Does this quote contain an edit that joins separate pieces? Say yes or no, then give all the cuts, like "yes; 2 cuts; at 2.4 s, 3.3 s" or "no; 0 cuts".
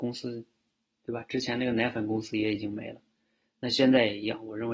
no; 0 cuts